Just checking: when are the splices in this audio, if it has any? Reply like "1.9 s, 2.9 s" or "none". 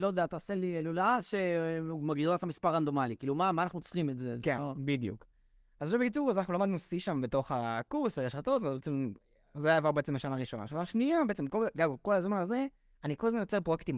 none